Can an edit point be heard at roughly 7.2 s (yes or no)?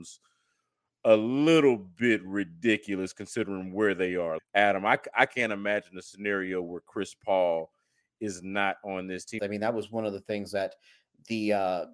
no